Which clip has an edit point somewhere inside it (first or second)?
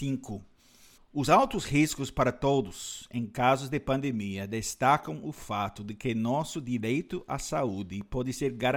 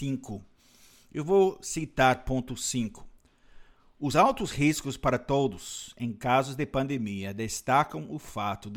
first